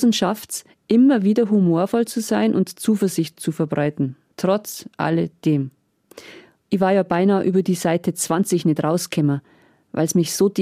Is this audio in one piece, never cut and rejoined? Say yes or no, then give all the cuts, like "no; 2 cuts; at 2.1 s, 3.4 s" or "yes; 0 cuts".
no; 1 cut; at 6.6 s